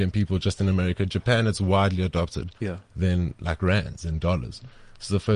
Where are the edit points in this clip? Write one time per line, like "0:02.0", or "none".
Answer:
0:02.6